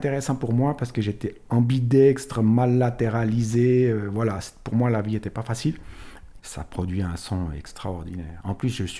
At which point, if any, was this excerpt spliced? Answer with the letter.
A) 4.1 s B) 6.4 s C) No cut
B